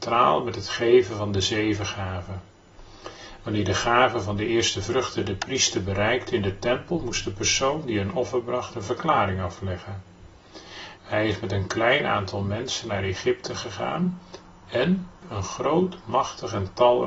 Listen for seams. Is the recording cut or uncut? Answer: cut